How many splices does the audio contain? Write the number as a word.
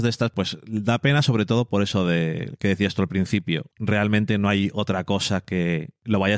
zero